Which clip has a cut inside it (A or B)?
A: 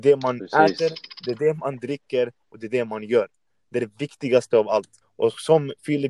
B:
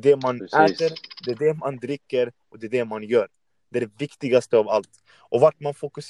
A